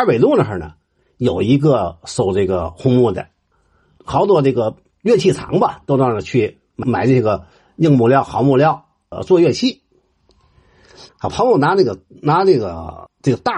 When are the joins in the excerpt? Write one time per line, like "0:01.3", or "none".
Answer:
0:11.1